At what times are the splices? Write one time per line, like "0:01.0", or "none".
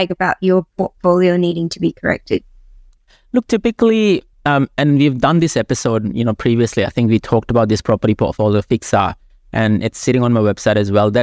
none